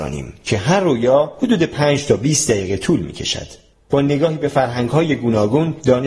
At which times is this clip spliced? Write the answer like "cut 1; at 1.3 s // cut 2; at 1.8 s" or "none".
cut 1; at 3.7 s